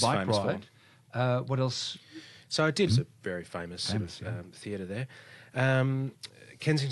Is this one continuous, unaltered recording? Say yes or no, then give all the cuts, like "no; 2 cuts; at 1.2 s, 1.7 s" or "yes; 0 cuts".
no; 1 cut; at 2.9 s